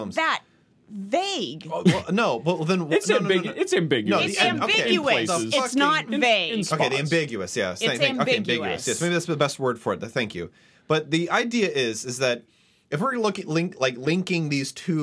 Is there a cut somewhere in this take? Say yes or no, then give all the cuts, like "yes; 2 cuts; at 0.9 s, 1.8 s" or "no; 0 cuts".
no; 0 cuts